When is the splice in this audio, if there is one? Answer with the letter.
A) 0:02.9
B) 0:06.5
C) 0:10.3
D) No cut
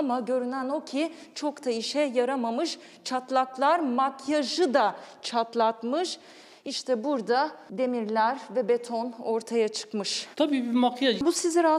C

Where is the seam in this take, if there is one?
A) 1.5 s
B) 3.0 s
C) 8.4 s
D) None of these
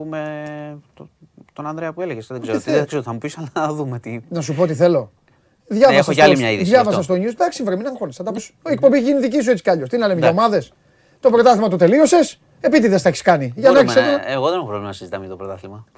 C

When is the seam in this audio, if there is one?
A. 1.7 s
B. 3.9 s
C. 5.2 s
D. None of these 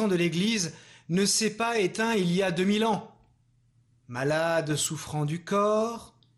B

